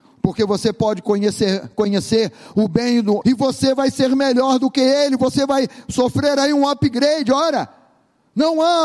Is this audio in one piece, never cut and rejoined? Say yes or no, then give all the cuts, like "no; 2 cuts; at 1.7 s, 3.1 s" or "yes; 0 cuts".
no; 1 cut; at 3.2 s